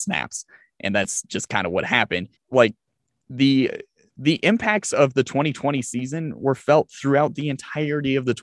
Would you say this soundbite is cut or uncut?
cut